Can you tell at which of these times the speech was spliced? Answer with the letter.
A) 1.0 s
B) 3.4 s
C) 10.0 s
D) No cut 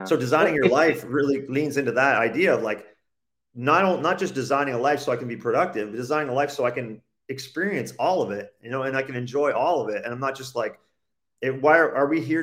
D